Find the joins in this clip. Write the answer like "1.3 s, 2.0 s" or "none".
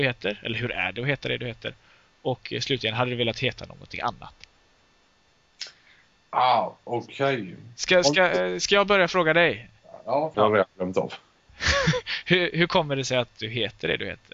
10.3 s